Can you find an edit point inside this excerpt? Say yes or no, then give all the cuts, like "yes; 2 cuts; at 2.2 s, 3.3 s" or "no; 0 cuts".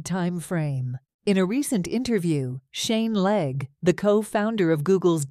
yes; 1 cut; at 1.1 s